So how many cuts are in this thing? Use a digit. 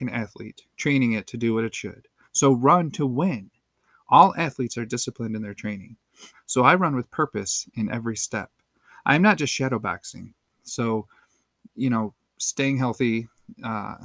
3